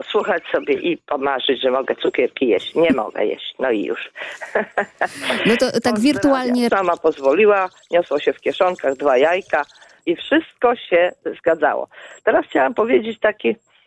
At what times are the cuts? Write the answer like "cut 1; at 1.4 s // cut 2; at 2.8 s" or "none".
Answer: cut 1; at 6.7 s // cut 2; at 10.0 s